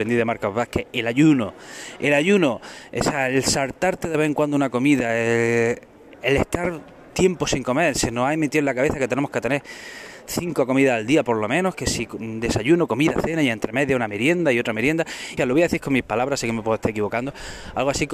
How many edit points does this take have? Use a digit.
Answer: 1